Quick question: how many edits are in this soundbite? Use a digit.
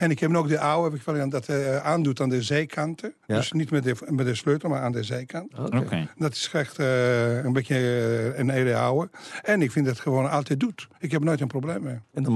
1